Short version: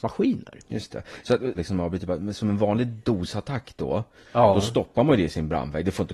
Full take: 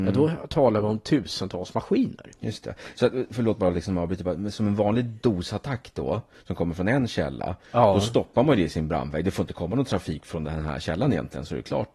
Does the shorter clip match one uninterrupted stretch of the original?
no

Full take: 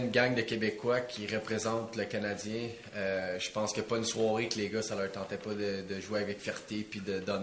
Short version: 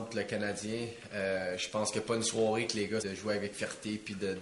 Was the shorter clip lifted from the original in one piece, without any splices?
no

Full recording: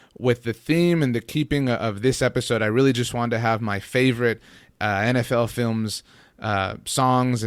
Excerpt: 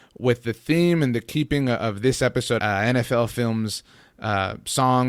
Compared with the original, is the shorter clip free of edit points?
no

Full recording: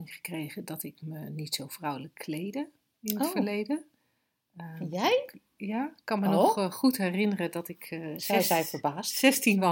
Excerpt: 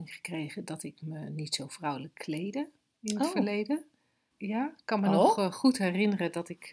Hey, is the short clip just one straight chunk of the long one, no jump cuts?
no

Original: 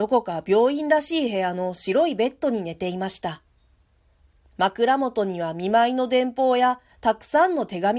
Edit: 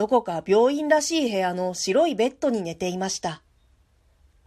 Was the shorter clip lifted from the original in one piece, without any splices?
yes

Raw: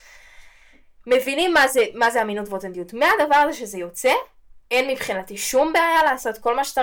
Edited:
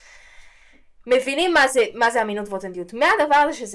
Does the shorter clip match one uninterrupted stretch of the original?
yes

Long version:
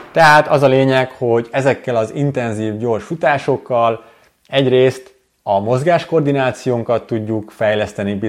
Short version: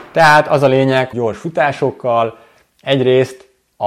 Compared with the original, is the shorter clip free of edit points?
no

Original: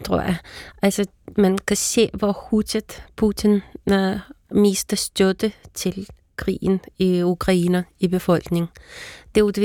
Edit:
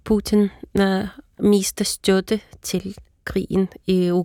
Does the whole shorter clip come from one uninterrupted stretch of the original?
yes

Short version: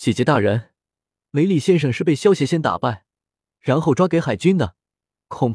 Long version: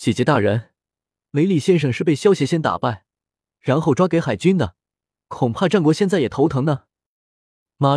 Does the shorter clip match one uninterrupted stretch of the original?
yes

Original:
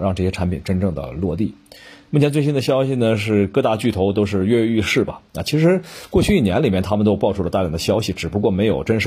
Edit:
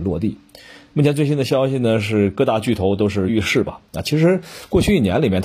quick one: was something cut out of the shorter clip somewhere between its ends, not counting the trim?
yes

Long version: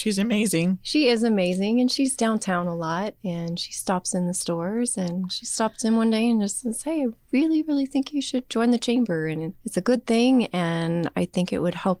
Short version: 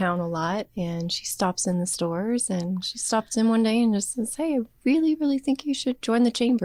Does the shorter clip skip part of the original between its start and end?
no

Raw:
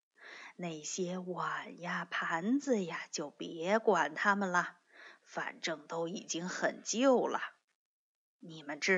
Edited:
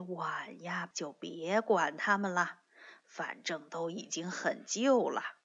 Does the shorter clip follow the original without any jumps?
no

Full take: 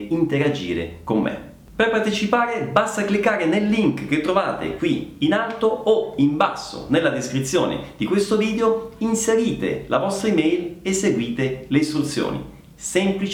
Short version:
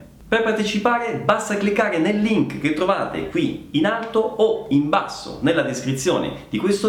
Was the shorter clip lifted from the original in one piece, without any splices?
yes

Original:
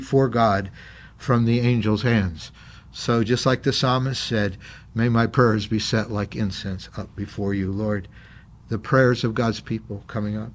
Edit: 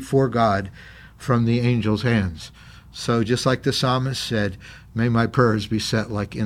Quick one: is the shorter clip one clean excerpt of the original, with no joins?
yes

